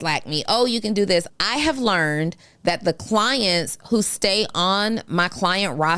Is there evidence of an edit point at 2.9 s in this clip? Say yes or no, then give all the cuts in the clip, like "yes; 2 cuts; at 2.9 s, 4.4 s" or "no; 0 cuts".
no; 1 cut; at 1.3 s